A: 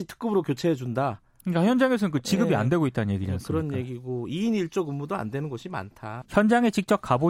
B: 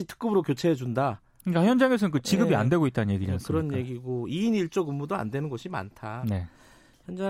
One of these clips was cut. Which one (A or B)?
A